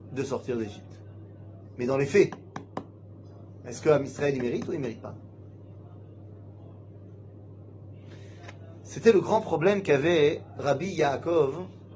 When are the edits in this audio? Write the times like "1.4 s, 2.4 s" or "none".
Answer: 1.8 s